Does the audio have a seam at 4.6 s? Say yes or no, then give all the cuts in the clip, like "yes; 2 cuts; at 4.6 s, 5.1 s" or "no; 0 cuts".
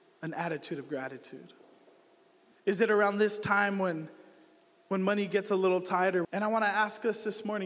no; 2 cuts; at 2.5 s, 6.2 s